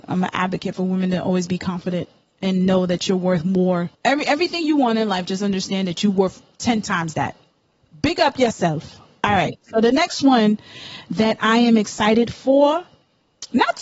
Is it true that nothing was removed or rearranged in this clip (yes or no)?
no